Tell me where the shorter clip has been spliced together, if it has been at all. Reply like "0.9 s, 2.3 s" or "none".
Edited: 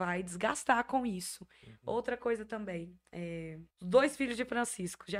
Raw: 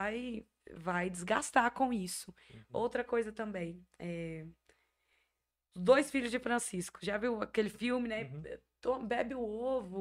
3.7 s